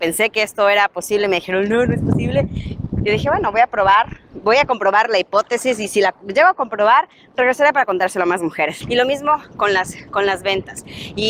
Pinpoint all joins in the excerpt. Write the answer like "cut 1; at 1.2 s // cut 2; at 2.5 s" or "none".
cut 1; at 8.8 s

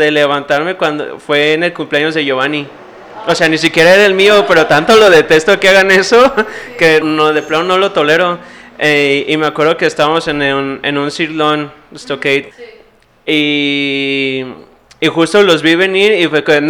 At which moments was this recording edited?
cut 1; at 7.0 s // cut 2; at 12.5 s

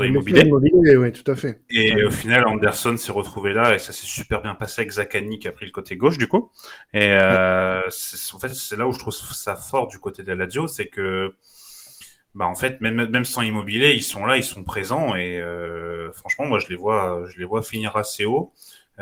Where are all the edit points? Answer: none

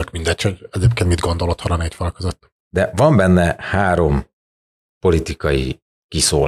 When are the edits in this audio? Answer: cut 1; at 2.6 s

